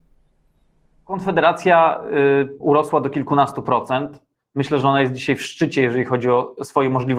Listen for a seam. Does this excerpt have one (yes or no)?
yes